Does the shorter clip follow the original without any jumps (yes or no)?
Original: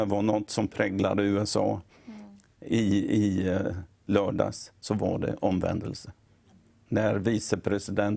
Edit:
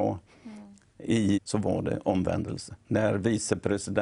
no